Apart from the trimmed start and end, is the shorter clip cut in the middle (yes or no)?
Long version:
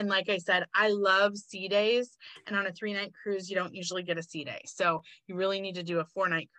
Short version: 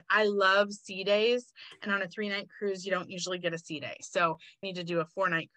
yes